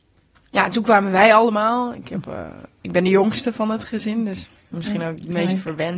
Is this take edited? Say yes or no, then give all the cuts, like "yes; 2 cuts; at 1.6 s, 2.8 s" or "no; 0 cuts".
no; 0 cuts